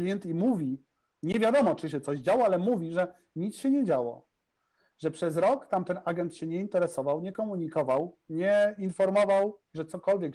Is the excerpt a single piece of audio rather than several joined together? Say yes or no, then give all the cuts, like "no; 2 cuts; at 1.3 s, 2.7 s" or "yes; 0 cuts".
yes; 0 cuts